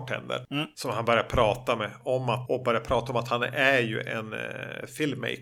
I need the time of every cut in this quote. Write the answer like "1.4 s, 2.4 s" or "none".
2.5 s